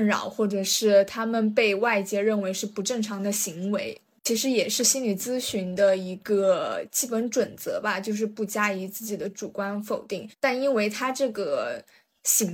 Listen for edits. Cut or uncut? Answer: uncut